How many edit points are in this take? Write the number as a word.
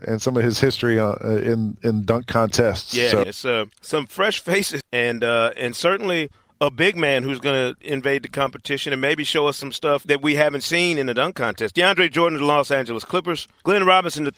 two